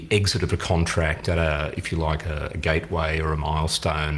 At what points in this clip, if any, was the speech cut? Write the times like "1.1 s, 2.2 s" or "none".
none